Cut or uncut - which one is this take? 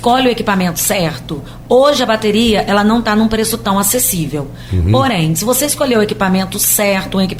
uncut